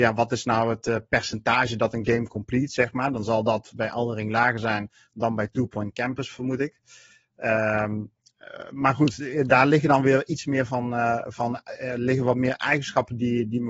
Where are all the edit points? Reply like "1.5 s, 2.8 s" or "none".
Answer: none

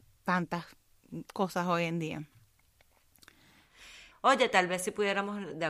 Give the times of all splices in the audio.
4.1 s

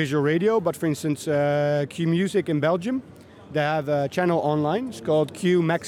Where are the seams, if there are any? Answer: none

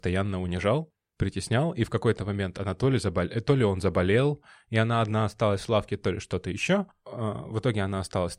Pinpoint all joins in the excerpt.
none

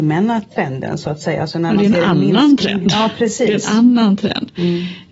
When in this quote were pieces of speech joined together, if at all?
none

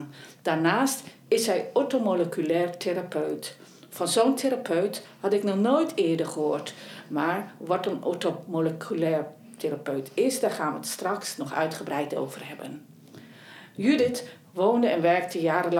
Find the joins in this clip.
none

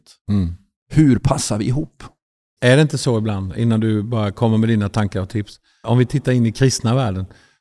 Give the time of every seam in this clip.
2.6 s, 5.8 s

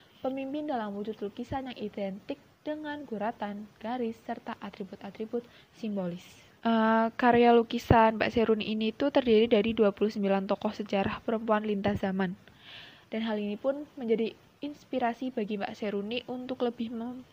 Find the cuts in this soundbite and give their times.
6.6 s, 13.0 s

